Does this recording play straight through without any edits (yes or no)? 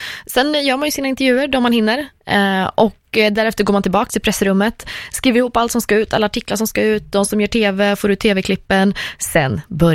yes